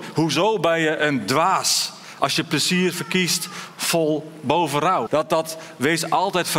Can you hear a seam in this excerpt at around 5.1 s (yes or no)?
yes